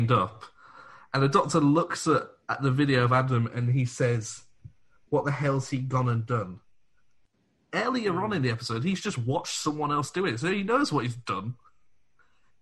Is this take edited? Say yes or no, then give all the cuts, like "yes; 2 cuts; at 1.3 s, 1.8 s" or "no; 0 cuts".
no; 0 cuts